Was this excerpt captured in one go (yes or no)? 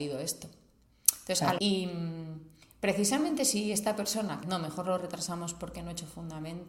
no